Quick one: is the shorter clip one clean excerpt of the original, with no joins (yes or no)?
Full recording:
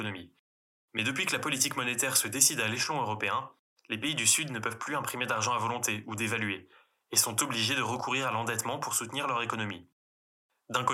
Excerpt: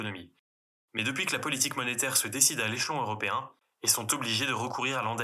no